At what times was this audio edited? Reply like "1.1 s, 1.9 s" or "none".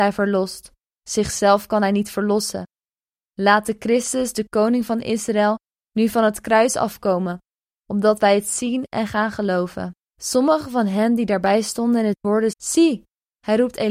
10.1 s, 12.5 s